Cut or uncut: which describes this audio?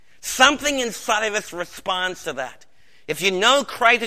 uncut